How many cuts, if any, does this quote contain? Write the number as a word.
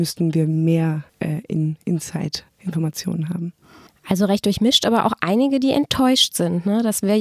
one